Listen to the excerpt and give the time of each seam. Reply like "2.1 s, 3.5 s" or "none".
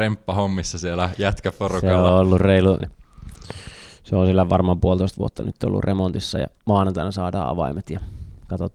2.8 s, 6.6 s